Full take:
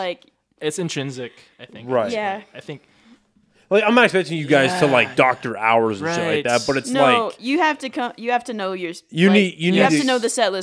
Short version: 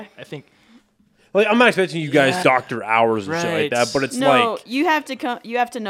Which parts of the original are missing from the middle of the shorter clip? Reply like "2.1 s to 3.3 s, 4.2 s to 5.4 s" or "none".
4.8 s to 5.2 s